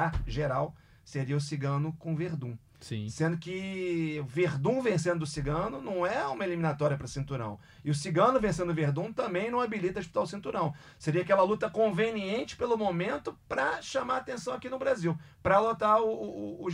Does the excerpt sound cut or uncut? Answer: uncut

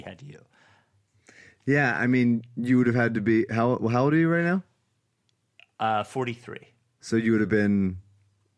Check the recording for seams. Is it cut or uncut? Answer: uncut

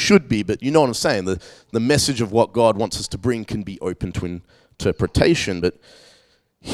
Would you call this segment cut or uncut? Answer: uncut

